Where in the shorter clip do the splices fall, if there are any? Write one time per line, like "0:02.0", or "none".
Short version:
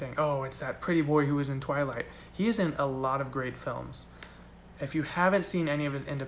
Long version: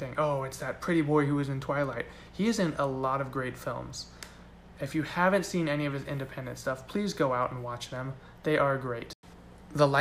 none